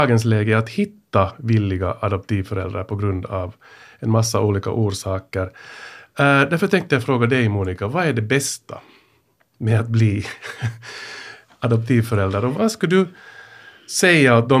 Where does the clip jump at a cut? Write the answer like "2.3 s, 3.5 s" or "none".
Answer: 12.5 s